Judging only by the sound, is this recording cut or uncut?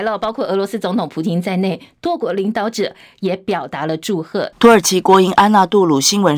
cut